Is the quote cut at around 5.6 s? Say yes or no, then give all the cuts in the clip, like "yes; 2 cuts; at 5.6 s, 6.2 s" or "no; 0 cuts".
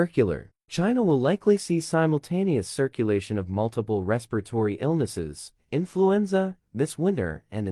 yes; 2 cuts; at 5.6 s, 6.6 s